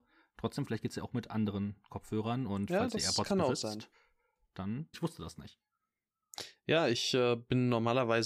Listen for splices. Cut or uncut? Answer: cut